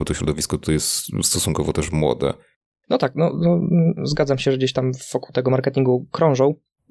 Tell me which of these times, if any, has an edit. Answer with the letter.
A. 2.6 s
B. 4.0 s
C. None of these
B